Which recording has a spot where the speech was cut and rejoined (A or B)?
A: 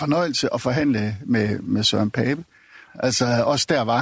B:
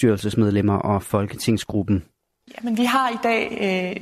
A